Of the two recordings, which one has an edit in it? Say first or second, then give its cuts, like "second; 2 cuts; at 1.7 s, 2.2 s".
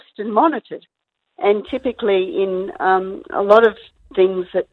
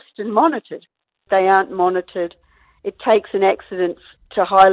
second; 1 cut; at 1.3 s